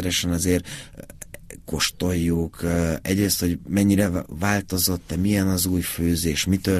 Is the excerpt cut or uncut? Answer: uncut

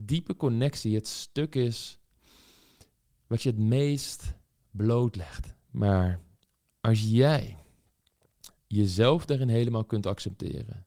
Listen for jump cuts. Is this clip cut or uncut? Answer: cut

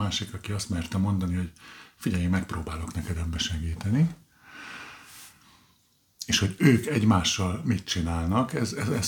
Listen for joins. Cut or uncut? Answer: uncut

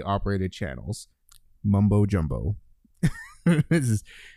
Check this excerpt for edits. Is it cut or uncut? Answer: uncut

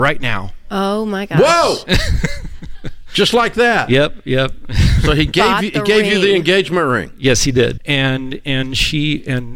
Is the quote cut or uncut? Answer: cut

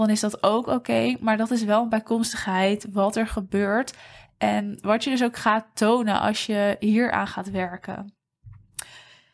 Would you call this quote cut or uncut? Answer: uncut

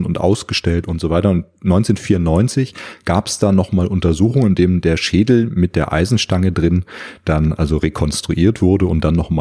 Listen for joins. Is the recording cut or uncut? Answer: uncut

